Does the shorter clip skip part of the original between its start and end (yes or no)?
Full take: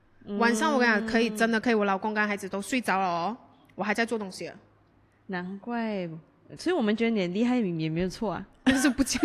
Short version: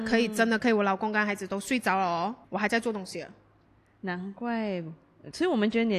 yes